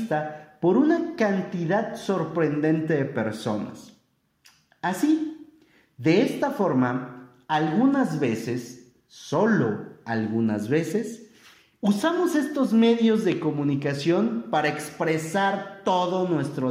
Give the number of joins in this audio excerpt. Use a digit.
0